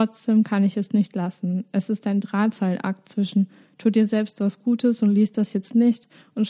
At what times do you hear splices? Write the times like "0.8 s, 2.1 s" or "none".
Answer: none